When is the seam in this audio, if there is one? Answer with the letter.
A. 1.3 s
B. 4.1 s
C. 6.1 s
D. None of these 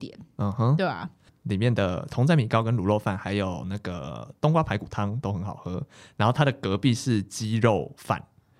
A